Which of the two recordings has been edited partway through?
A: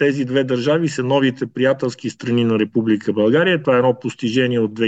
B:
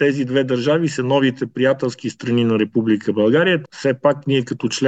B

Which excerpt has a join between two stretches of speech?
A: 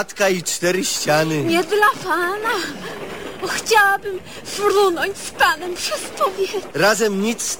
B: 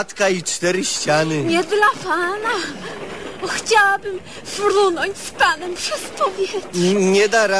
A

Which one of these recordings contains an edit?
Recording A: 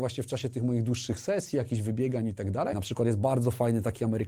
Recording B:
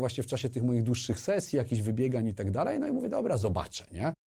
A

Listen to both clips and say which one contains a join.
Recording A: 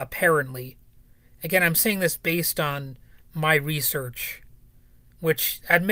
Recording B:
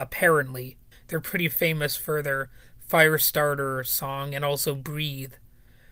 B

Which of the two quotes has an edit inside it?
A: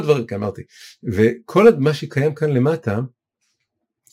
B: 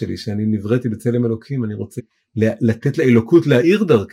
B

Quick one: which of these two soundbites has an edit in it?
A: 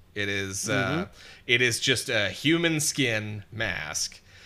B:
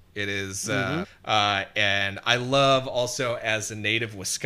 B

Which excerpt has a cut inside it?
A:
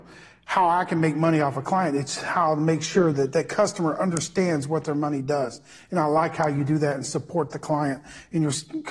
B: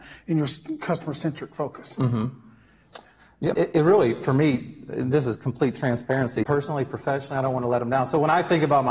B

